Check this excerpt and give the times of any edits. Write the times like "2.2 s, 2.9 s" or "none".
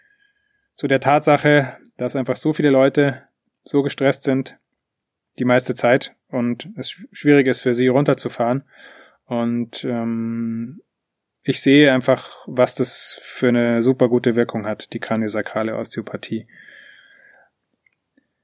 none